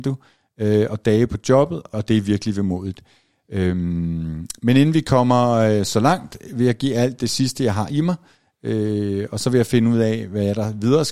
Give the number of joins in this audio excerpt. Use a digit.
1